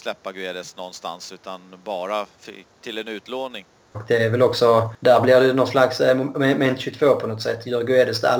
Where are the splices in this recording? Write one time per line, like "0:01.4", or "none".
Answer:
0:03.9